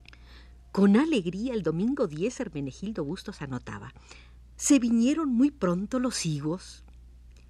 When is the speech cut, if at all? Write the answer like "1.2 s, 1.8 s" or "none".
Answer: 4.6 s